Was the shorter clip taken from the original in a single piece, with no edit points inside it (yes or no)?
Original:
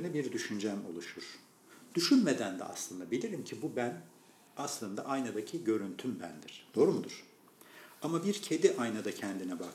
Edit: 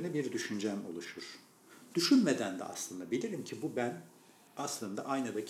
yes